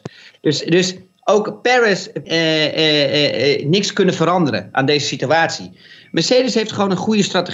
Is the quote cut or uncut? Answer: cut